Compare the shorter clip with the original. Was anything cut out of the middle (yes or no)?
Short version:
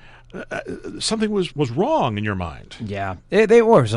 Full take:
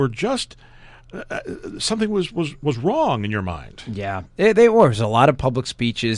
yes